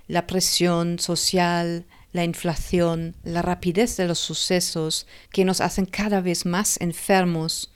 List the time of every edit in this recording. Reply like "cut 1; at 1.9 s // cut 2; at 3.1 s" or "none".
cut 1; at 5.2 s